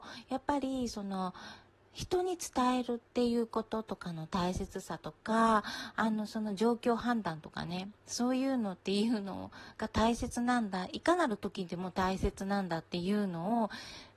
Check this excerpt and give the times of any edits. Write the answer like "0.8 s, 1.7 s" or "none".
none